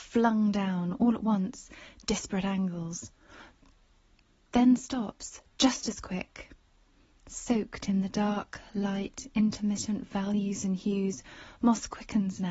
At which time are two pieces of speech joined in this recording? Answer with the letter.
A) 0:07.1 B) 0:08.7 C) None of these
C